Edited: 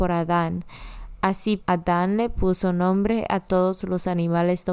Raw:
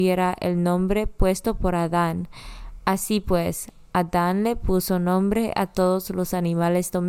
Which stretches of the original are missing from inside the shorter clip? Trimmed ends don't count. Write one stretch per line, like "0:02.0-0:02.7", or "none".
0:03.2-0:03.8